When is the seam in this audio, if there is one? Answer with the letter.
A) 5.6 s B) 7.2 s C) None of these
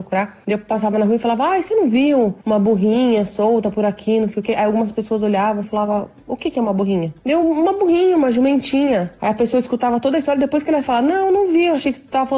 A